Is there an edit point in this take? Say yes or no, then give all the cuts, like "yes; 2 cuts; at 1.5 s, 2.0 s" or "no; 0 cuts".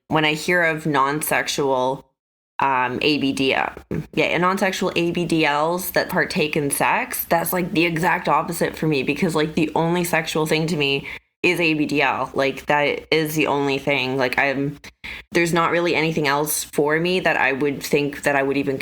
yes; 2 cuts; at 6.1 s, 15.2 s